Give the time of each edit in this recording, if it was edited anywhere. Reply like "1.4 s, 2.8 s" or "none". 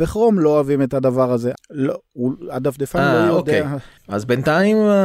1.5 s, 4.0 s